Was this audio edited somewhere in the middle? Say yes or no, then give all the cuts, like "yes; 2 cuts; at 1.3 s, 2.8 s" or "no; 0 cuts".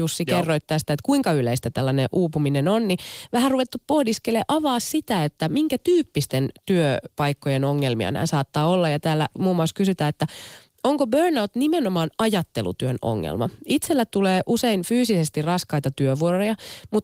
no; 0 cuts